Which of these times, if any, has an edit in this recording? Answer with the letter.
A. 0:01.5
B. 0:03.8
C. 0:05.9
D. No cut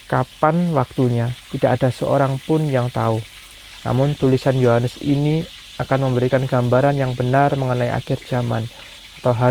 B